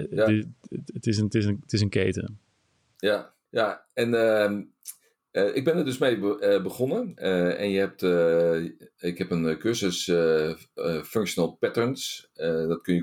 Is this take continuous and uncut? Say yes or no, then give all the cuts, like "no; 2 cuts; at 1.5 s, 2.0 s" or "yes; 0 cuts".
no; 1 cut; at 3.5 s